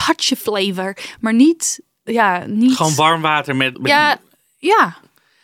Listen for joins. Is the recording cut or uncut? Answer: cut